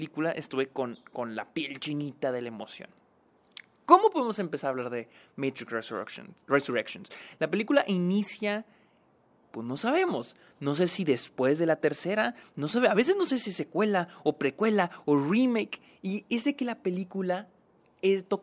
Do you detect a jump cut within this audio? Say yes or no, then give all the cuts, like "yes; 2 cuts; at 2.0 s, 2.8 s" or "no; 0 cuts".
no; 0 cuts